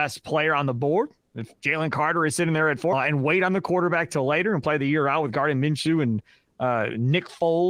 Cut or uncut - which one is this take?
cut